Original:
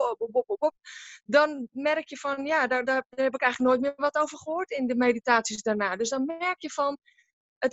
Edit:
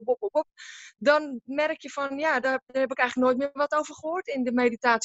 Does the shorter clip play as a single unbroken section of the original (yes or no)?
no